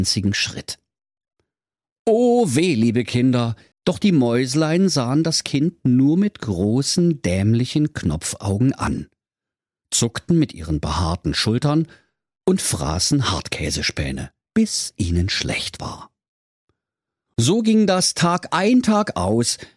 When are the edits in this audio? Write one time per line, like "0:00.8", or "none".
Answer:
0:03.7